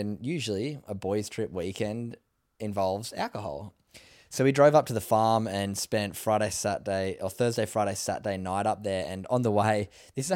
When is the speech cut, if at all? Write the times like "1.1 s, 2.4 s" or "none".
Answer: none